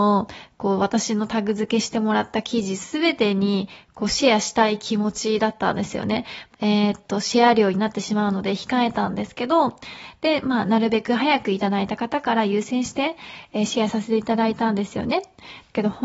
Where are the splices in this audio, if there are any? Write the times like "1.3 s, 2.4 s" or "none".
6.5 s